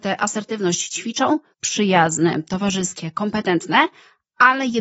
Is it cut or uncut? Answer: cut